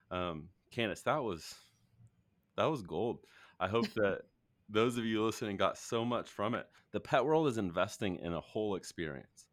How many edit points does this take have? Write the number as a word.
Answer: one